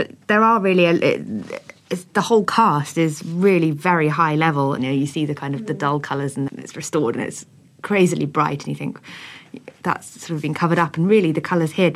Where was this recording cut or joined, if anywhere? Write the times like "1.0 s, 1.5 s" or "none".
4.8 s, 6.5 s